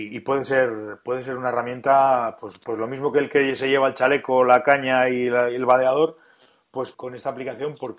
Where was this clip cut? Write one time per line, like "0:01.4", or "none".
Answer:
0:06.9